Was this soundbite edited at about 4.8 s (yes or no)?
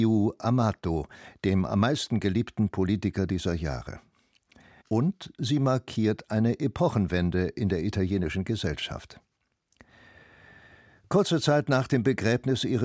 yes